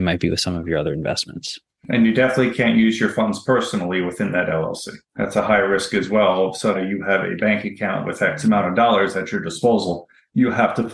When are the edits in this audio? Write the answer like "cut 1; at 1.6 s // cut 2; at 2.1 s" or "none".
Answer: cut 1; at 5.0 s // cut 2; at 6.7 s

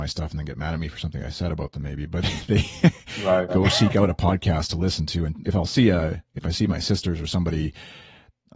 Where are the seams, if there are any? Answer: cut 1; at 3.5 s // cut 2; at 5.4 s

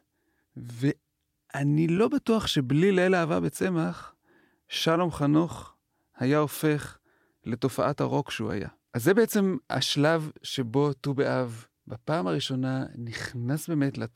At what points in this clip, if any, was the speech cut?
cut 1; at 8.9 s // cut 2; at 11.8 s

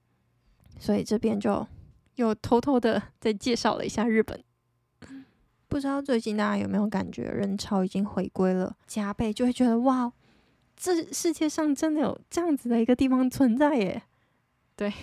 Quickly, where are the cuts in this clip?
cut 1; at 8.8 s

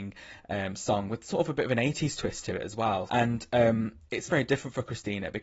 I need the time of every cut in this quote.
cut 1; at 3.1 s // cut 2; at 4.3 s

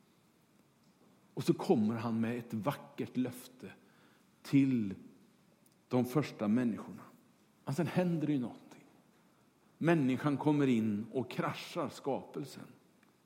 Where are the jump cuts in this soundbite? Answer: cut 1; at 7.4 s

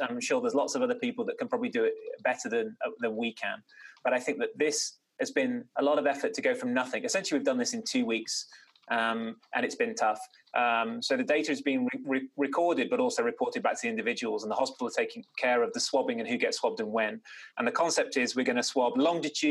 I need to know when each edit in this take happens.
cut 1; at 10.5 s

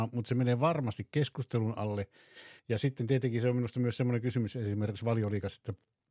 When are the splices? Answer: none

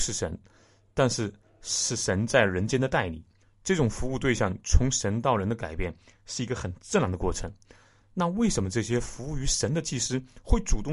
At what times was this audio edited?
cut 1; at 3.4 s

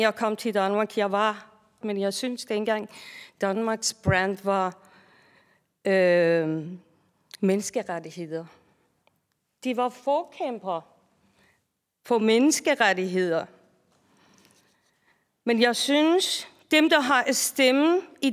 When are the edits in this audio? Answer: cut 1; at 1.8 s

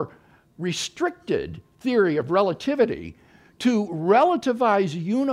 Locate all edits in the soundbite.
none

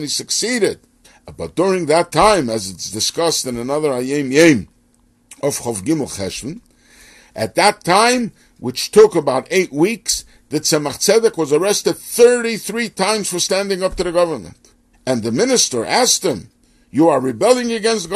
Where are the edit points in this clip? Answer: none

